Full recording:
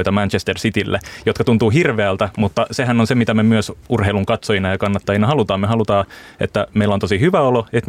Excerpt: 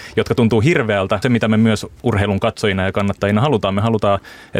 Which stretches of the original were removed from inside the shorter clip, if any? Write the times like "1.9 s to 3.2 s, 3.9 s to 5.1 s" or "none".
2.3 s to 3.1 s